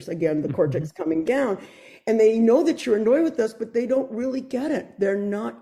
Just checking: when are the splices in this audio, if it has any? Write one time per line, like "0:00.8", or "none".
none